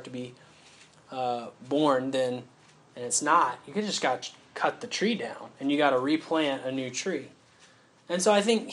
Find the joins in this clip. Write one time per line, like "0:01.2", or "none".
none